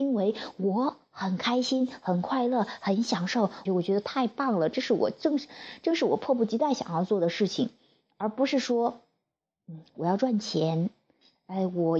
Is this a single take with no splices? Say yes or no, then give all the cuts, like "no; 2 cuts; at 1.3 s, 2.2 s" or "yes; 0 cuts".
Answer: no; 1 cut; at 3.7 s